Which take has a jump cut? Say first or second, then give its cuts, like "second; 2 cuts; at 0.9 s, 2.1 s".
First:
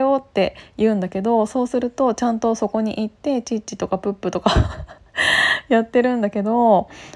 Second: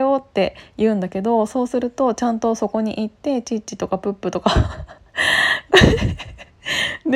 second; 1 cut; at 5.7 s